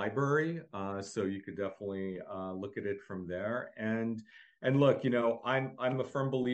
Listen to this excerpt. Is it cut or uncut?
uncut